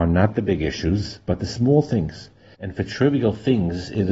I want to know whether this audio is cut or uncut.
cut